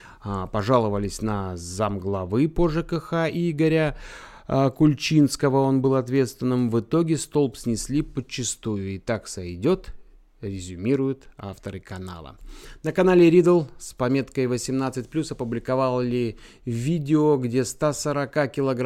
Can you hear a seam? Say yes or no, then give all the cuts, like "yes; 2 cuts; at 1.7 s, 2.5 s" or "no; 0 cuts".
no; 0 cuts